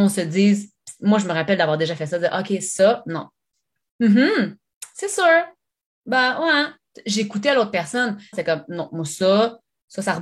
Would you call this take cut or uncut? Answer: cut